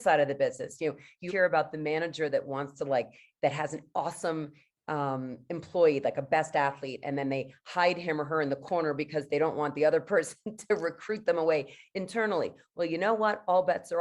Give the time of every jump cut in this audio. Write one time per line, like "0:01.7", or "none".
0:01.3